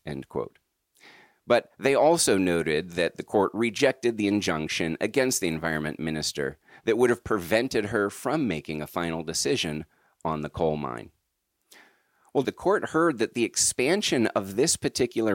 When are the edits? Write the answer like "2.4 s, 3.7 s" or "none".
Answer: 12.4 s